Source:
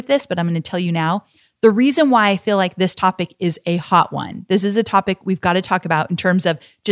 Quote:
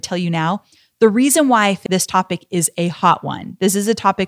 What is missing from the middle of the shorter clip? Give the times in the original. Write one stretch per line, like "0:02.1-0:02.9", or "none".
0:02.5-0:02.7